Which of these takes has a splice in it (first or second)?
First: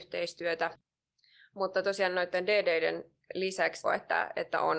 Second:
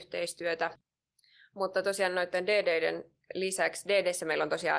first